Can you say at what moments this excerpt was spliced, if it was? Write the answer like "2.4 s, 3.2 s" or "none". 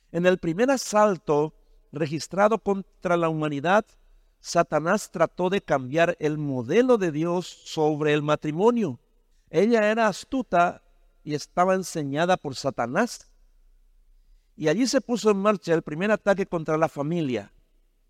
9.3 s